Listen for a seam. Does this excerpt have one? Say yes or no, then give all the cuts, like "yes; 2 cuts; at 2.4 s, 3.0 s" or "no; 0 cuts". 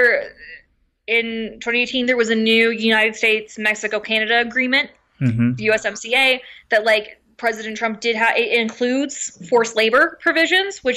no; 0 cuts